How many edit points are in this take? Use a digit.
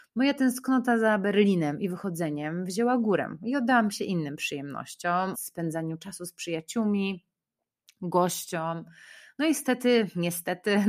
1